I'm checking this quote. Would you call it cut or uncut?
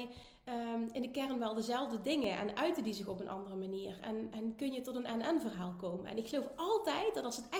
cut